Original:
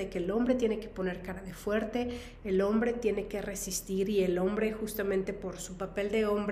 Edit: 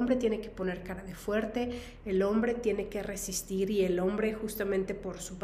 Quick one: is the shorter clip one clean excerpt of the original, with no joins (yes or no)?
yes